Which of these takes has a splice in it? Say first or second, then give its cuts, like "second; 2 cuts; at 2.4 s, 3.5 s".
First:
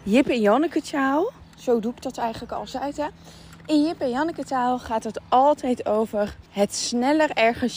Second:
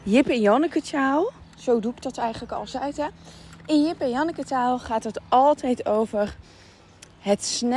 first; 1 cut; at 6.5 s